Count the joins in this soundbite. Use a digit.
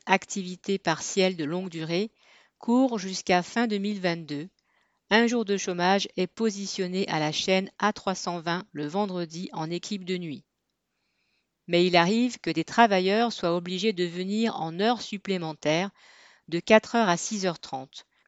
0